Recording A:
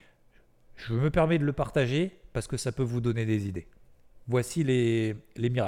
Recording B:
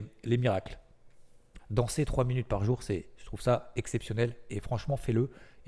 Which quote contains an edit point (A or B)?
B